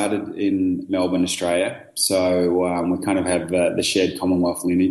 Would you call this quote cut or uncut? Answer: uncut